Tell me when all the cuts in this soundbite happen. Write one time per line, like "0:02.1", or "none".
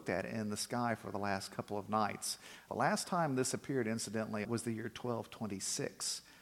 0:02.7
0:04.4

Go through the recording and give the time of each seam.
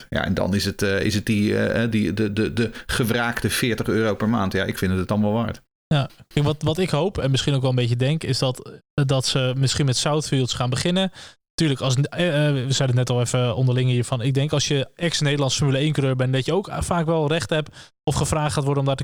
none

